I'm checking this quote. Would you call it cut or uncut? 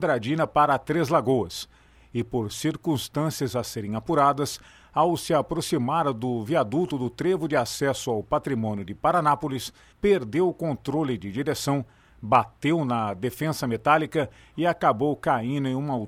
cut